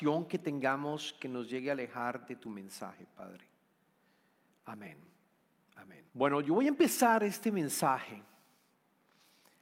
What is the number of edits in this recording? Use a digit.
2